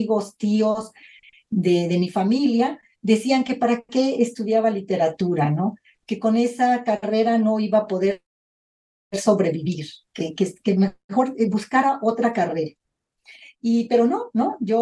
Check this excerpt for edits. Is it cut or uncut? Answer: uncut